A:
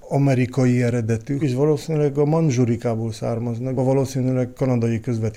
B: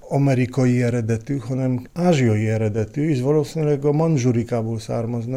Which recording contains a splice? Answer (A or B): A